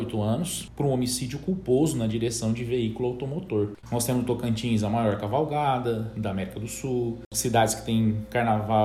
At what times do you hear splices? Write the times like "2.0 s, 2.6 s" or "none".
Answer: 3.8 s